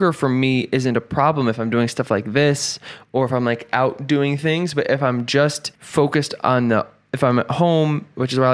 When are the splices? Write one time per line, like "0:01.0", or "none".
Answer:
0:05.7